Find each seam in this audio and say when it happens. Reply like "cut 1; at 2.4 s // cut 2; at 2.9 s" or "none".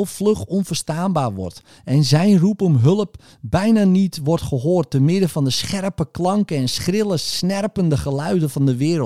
none